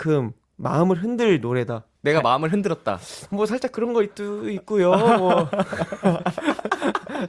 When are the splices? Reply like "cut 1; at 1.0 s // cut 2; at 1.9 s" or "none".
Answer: cut 1; at 2.0 s